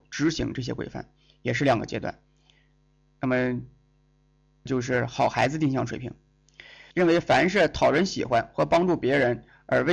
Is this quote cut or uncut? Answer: cut